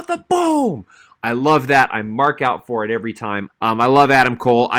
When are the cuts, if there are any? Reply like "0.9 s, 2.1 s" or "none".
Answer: 3.5 s